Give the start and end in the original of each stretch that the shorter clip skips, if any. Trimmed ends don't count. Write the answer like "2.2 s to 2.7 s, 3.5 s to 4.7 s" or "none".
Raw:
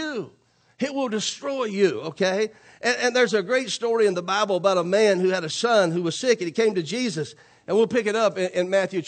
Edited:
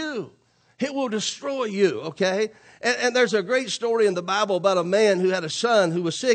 none